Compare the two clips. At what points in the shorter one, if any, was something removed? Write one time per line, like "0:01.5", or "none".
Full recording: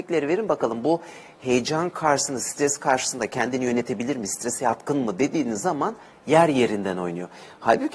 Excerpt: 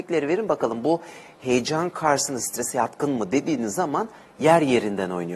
0:02.4